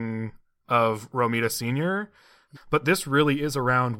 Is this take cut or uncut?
cut